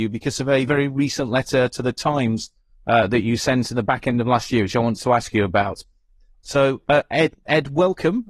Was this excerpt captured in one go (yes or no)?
yes